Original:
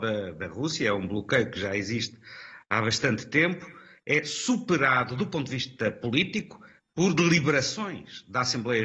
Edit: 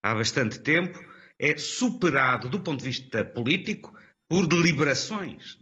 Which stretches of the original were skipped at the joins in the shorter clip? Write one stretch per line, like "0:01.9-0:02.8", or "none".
none